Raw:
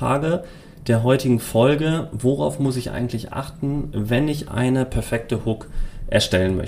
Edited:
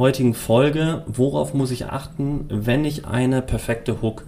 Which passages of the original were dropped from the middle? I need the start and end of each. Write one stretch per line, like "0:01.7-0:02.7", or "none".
0:02.9-0:03.3